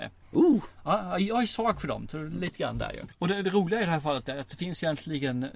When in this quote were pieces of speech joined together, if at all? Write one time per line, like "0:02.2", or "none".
none